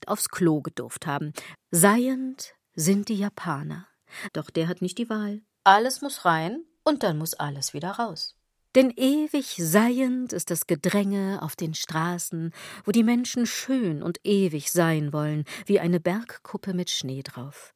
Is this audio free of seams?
no; 2 cuts; at 1.5 s, 4.3 s

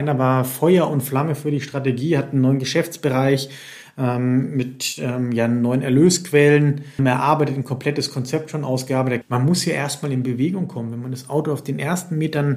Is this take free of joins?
no; 2 cuts; at 7.0 s, 9.2 s

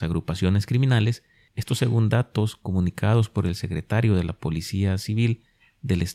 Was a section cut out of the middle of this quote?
no; 0 cuts

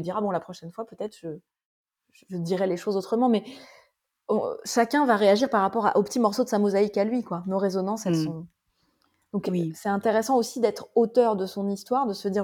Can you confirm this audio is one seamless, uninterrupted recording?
yes; 0 cuts

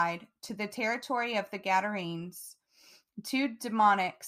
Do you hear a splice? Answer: no; 0 cuts

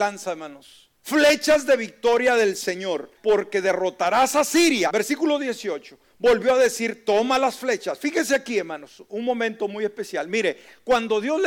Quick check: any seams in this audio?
yes; 3 cuts; at 0.9 s, 3.2 s, 4.9 s

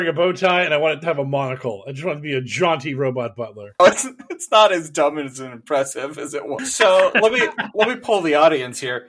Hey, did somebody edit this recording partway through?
yes; 2 cuts; at 3.8 s, 6.6 s

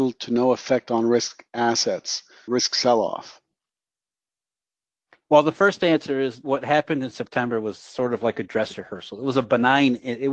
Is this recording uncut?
no; 1 cut; at 2.5 s

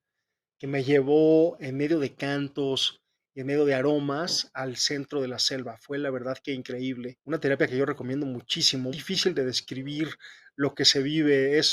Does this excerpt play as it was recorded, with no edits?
no; 2 cuts; at 7.2 s, 8.9 s

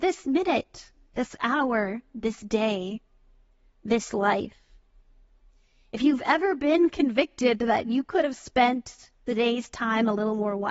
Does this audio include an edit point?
no; 0 cuts

